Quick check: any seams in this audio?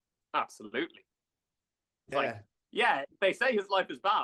yes; 1 cut; at 2.1 s

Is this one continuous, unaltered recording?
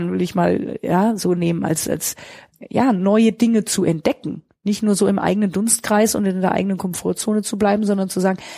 yes; 0 cuts

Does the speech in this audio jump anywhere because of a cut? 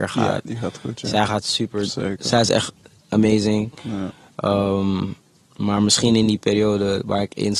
no; 0 cuts

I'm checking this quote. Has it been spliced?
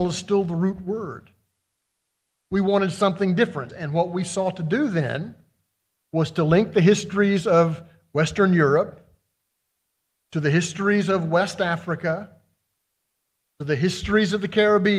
yes; 1 cut; at 3.7 s

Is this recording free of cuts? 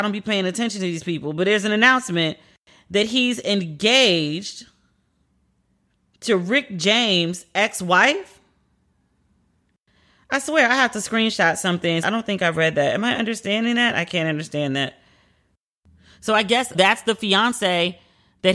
no; 2 cuts; at 12.0 s, 16.7 s

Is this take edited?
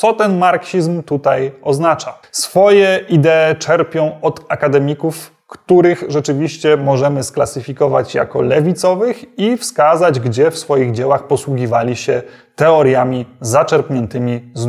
yes; 1 cut; at 2.2 s

